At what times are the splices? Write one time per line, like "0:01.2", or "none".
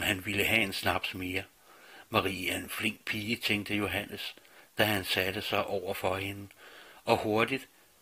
none